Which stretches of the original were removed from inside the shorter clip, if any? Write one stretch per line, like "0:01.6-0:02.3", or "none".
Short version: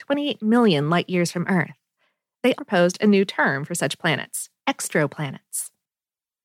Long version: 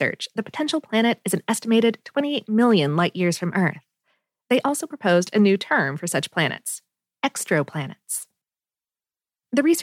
0:04.6-0:04.9
0:06.9-0:07.1